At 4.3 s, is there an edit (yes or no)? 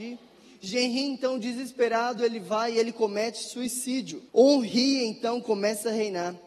yes